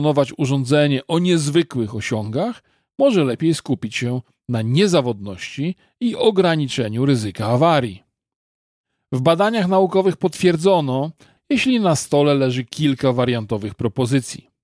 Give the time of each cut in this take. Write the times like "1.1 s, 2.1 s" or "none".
11.4 s